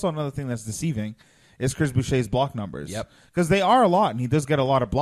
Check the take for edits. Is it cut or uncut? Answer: uncut